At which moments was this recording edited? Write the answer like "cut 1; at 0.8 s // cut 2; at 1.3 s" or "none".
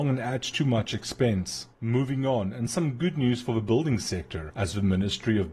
cut 1; at 1.7 s